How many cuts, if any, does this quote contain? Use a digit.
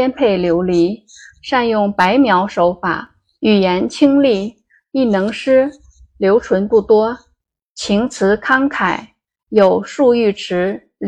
1